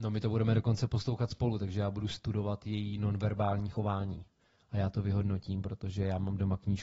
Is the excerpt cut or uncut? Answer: uncut